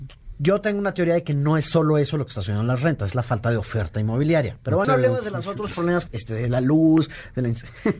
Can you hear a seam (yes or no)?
yes